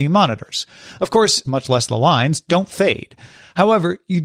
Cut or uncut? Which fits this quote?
cut